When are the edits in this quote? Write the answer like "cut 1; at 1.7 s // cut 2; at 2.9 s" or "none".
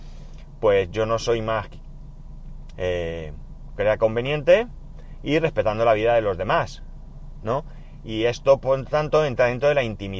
cut 1; at 2.7 s // cut 2; at 3.7 s